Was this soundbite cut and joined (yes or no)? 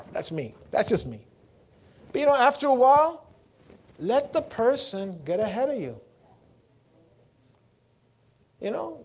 no